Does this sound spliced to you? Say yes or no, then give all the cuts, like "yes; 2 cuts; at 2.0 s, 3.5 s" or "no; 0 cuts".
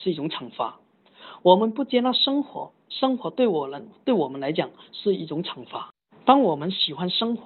no; 0 cuts